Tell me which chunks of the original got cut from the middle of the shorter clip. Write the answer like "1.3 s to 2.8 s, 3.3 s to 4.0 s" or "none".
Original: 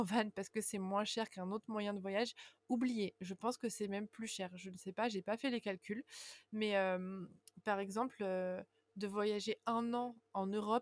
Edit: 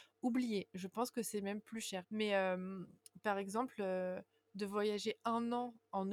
4.5 s to 6.4 s